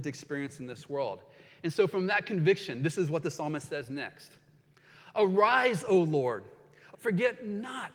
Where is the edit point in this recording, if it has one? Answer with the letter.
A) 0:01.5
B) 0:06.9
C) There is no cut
B